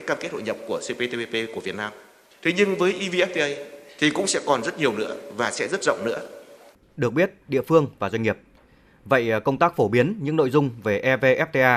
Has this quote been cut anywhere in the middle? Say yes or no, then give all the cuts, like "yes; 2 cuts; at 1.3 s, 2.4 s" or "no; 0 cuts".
yes; 1 cut; at 7.5 s